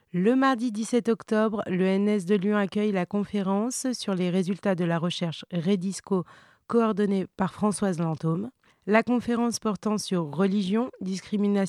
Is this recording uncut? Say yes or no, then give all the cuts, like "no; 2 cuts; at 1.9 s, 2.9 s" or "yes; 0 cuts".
yes; 0 cuts